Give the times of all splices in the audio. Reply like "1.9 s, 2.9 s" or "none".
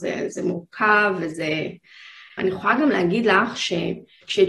2.4 s